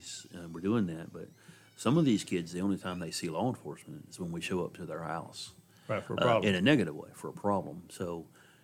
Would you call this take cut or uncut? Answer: uncut